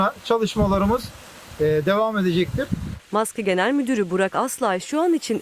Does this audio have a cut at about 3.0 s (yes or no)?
yes